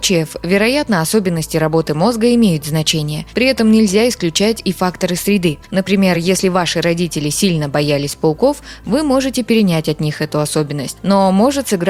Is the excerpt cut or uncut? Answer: uncut